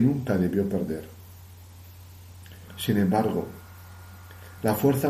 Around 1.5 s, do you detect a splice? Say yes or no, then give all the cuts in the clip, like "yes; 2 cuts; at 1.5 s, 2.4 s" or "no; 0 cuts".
no; 1 cut; at 2.7 s